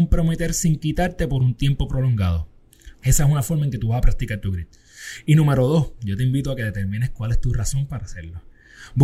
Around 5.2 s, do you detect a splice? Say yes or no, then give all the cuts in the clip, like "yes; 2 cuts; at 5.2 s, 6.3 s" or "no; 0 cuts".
no; 1 cut; at 2.9 s